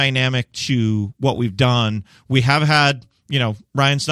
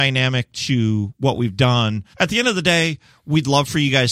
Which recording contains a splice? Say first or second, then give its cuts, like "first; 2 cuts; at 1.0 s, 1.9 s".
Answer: second; 1 cut; at 2.1 s